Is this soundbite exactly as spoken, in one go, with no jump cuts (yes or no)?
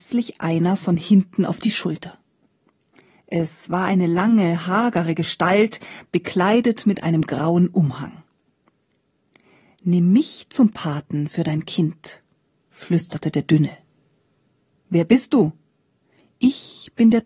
yes